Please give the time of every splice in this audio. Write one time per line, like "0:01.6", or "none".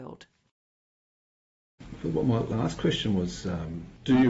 none